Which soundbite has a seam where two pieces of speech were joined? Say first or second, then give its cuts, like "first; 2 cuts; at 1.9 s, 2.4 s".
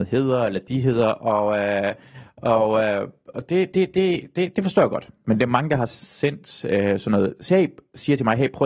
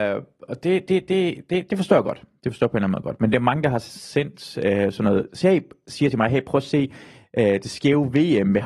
first; 1 cut; at 5.2 s